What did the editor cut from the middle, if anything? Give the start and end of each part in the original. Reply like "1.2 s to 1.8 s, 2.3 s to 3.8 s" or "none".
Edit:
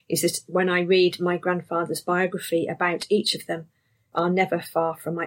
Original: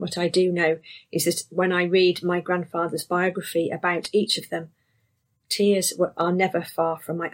5.2 s to 6.1 s